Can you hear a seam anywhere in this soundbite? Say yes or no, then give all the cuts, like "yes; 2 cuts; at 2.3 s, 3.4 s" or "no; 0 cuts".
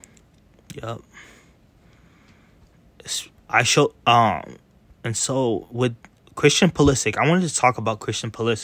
no; 0 cuts